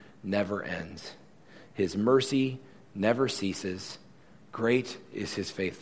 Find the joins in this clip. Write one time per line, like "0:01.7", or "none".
none